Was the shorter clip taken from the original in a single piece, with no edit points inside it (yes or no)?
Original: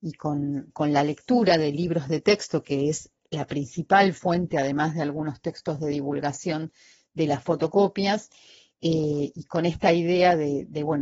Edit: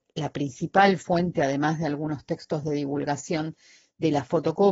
yes